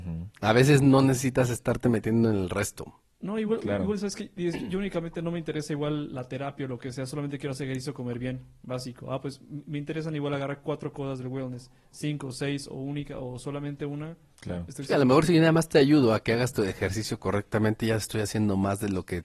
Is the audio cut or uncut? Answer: uncut